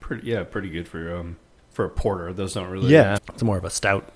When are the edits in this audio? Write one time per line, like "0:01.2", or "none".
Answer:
0:03.2